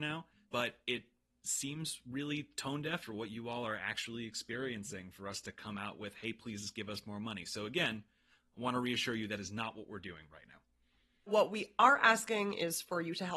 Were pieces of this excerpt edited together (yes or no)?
no